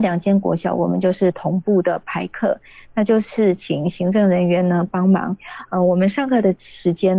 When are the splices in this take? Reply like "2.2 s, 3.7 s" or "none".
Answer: none